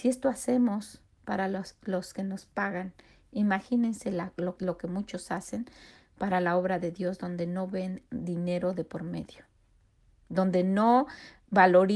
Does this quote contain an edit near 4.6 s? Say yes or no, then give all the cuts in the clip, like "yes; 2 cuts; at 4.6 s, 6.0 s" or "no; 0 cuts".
yes; 1 cut; at 4.6 s